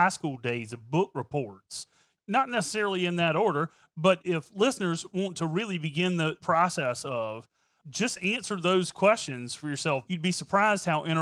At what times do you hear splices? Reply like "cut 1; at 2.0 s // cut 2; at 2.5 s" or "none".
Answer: cut 1; at 2.2 s // cut 2; at 10.1 s